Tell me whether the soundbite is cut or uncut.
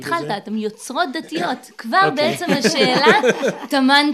uncut